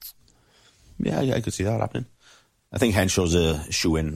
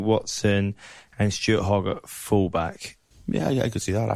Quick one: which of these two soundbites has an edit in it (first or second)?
second